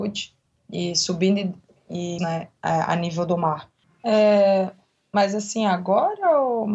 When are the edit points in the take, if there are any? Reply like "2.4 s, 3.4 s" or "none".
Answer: 2.2 s, 3.8 s